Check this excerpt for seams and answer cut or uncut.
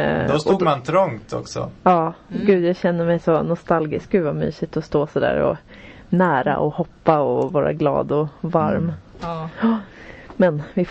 uncut